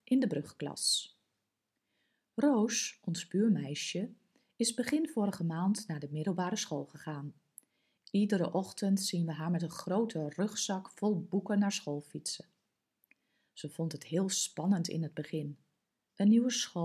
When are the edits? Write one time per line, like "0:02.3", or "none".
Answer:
none

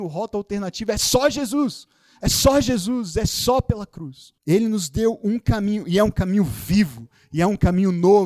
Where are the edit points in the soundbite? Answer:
0:04.4

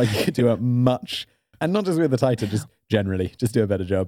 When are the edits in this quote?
none

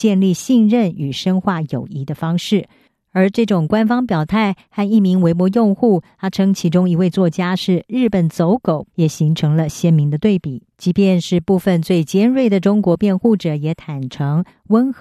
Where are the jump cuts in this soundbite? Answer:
0:08.9
0:10.7

